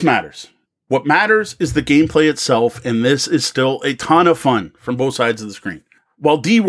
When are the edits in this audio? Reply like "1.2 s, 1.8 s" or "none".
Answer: none

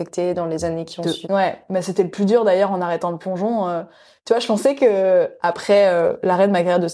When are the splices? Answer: 1.2 s

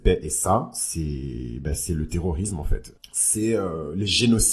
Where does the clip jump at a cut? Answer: 3.0 s

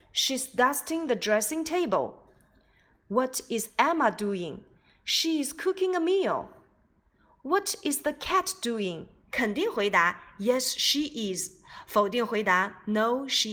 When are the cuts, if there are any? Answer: 9.3 s

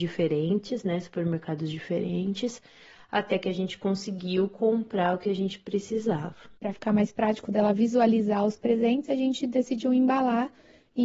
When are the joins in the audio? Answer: none

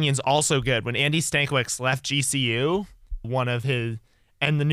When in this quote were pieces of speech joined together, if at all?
3.2 s

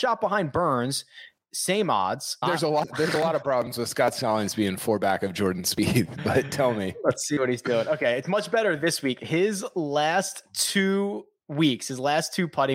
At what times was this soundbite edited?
2.4 s

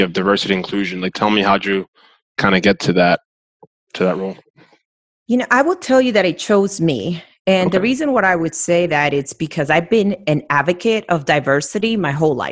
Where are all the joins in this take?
none

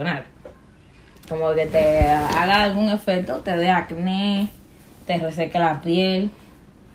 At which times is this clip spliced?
1.2 s

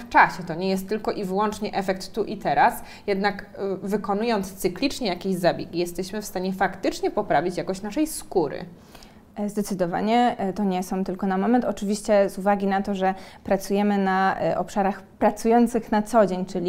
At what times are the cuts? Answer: 15.1 s

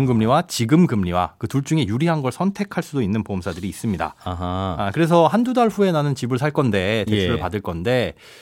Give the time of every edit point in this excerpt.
none

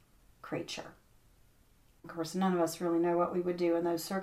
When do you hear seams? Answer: 2.0 s

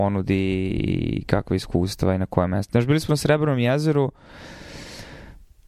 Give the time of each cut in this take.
none

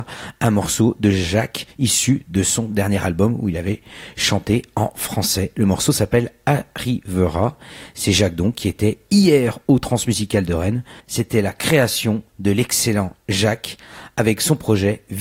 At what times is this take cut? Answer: 11.0 s

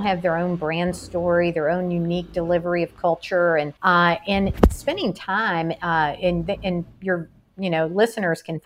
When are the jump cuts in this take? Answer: 3.8 s

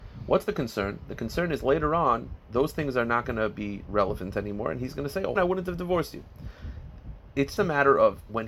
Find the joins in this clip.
5.4 s, 7.6 s

